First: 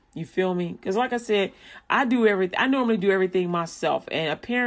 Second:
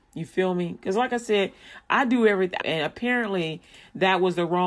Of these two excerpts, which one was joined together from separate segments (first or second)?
second